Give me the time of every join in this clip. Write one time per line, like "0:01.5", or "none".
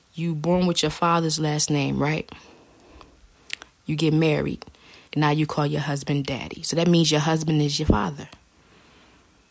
0:05.1